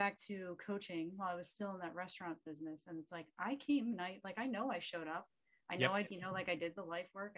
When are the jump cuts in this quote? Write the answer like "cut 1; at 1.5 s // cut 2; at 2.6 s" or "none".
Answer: cut 1; at 6.1 s